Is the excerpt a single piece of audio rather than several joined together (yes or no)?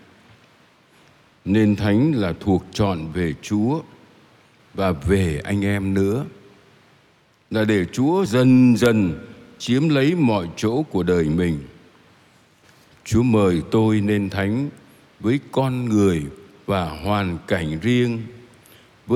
yes